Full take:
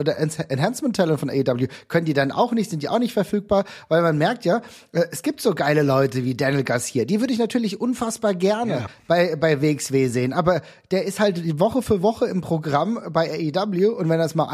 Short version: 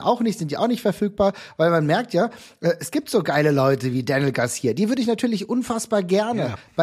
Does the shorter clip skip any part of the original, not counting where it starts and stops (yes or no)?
no